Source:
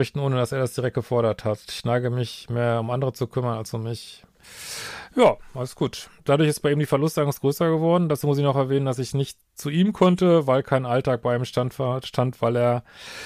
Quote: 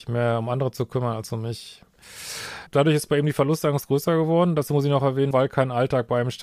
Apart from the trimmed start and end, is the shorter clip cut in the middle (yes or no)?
yes